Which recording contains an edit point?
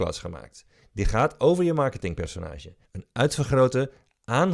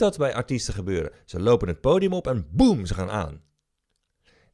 first; 1 cut; at 2.8 s

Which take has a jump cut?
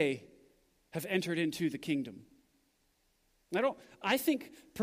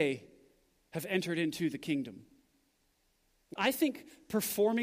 second; 1 cut; at 3.5 s

